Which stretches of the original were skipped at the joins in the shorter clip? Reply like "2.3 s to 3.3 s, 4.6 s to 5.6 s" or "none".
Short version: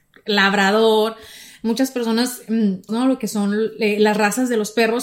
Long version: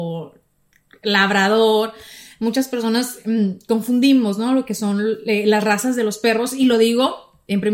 3.7 s to 4.4 s